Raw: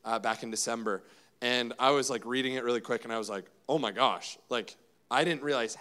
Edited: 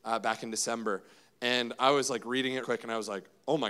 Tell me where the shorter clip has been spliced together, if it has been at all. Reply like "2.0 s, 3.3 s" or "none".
2.6 s